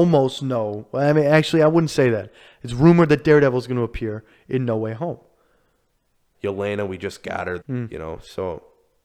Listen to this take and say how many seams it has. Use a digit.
2